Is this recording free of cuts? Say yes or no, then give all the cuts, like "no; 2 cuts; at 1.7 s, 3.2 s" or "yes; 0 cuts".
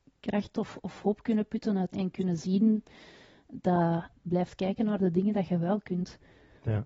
no; 2 cuts; at 1.9 s, 4.2 s